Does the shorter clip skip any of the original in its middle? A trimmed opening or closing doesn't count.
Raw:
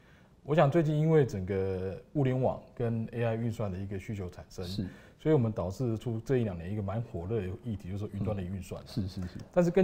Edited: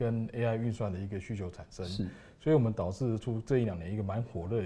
no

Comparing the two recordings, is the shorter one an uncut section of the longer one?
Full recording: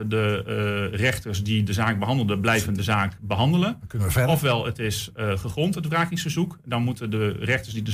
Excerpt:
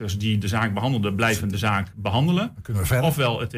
yes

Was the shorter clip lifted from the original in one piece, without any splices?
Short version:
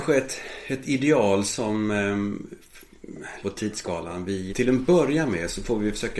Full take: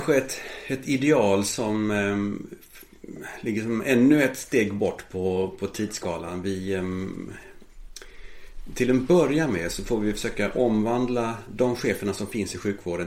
no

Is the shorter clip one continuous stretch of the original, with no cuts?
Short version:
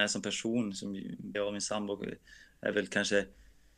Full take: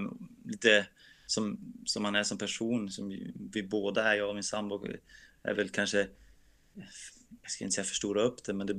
no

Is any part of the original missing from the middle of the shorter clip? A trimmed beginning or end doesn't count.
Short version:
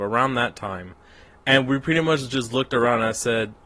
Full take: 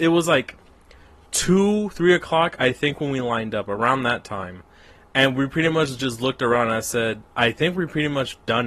no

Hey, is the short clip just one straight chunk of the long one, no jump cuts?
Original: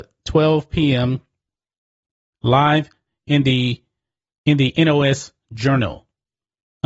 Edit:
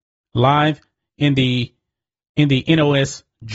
yes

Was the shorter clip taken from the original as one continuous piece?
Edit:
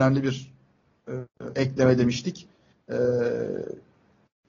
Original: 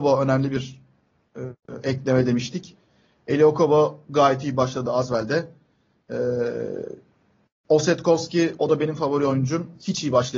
no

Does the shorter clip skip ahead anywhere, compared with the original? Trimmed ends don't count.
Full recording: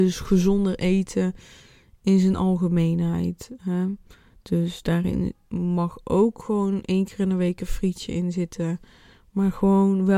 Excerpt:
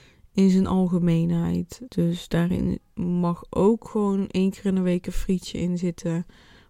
yes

